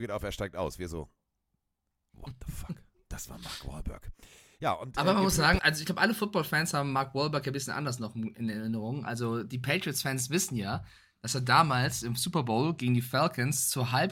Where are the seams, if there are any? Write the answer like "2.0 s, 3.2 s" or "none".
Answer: 5.6 s